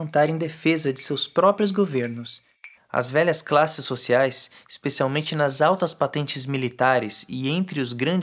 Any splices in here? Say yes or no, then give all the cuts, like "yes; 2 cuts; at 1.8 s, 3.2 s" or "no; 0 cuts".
yes; 1 cut; at 2.7 s